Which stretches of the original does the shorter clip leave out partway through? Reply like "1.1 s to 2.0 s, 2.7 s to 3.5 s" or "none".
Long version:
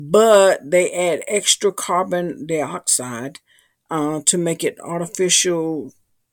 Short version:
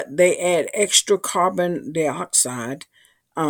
none

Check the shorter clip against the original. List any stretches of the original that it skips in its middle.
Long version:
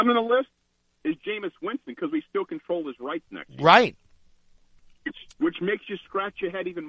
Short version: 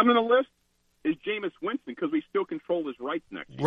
none

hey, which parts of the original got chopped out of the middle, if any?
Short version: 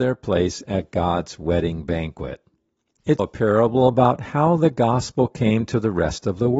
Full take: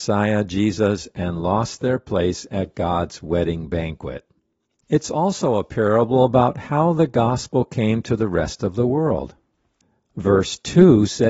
5.0 s to 5.6 s

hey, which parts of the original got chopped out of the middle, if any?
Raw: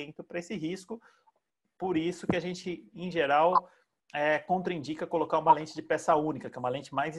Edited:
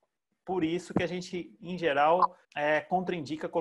3.8 s to 4.0 s

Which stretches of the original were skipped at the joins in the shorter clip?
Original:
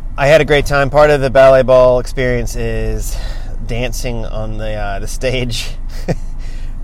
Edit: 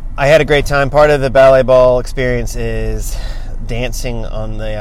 none

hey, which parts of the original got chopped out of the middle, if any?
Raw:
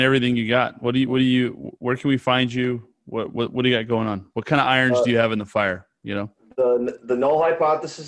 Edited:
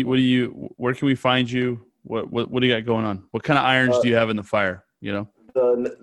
none

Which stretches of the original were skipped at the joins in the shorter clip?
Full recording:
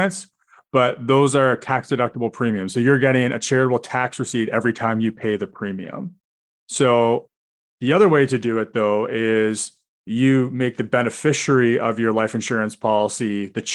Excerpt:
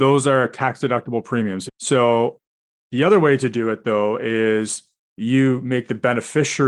2.7 s to 6.5 s

